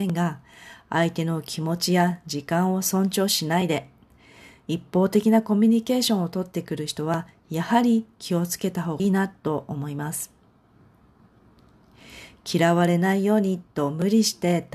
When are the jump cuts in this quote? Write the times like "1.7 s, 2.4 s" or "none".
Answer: 9.0 s